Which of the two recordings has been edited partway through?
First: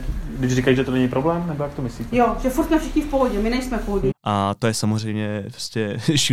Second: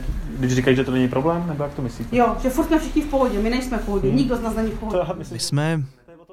first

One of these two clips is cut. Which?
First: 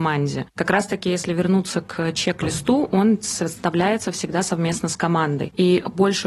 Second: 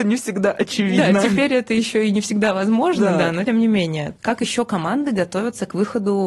second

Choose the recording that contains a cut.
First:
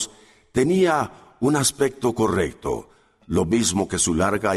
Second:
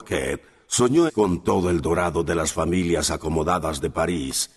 second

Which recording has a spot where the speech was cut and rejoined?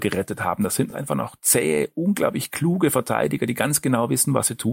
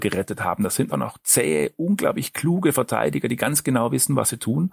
second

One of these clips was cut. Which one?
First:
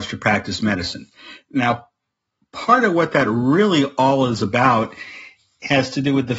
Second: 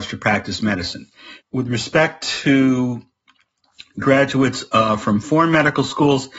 second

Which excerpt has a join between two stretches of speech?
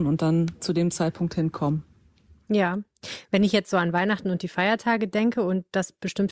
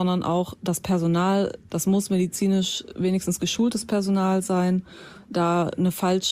second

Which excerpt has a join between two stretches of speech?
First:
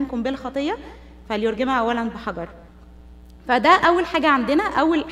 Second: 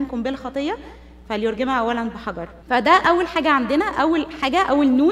second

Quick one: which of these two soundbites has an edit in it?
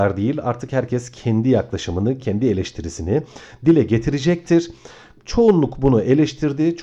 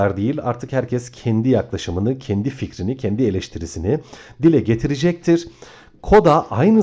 first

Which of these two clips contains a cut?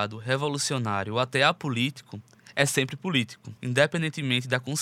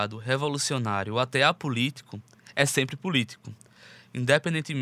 first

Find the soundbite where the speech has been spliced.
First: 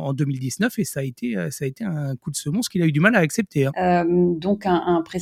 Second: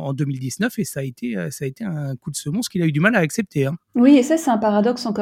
first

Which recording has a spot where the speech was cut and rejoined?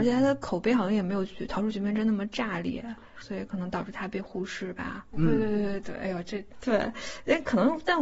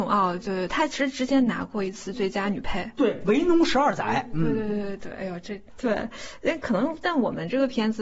first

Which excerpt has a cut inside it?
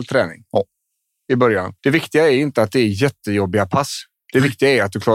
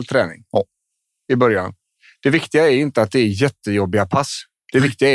first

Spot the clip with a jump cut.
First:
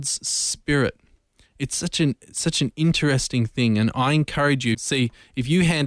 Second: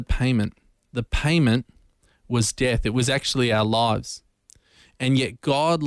first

